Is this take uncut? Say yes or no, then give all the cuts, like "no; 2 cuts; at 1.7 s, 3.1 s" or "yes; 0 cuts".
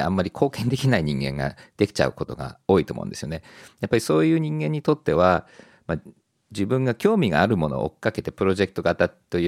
yes; 0 cuts